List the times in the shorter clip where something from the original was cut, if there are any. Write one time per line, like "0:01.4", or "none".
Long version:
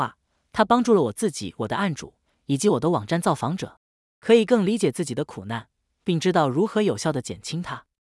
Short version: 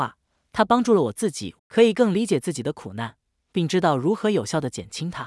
0:01.6

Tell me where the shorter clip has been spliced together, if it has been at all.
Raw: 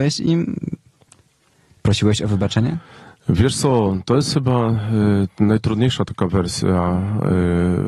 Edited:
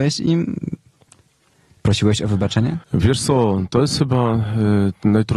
0:02.8

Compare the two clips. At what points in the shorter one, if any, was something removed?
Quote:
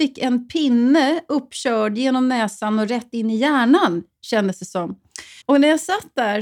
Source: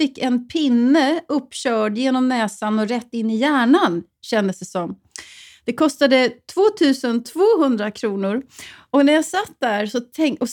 0:05.4

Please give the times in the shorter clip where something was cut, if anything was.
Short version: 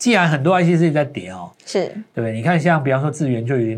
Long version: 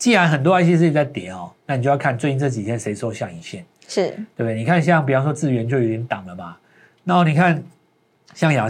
0:01.5

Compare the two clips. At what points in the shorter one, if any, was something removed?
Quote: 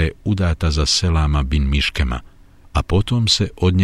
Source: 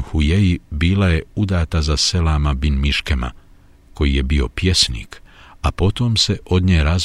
0:02.6

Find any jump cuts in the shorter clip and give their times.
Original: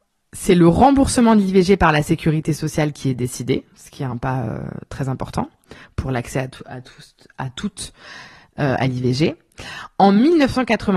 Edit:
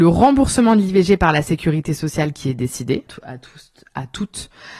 0:03.1

